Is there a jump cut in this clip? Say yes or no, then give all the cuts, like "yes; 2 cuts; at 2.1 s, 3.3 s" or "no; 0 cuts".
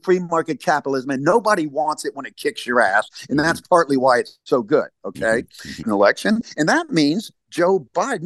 yes; 1 cut; at 5.8 s